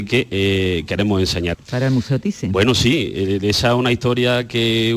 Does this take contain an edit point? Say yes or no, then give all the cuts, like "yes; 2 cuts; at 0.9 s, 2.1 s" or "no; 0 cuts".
yes; 1 cut; at 1.5 s